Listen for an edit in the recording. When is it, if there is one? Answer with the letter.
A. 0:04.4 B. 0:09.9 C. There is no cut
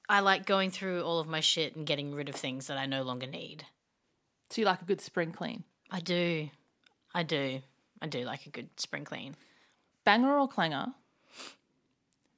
B